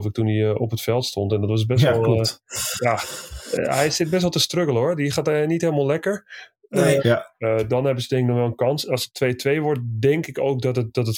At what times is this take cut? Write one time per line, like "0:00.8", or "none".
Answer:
0:07.0